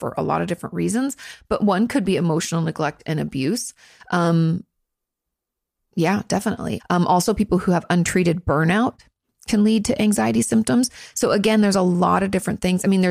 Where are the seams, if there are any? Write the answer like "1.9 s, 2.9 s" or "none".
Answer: 6.8 s